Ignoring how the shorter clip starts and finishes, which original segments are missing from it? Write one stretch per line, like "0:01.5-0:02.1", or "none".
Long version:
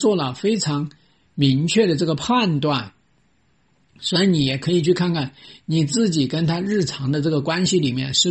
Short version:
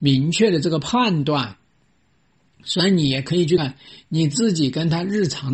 0:04.9-0:05.1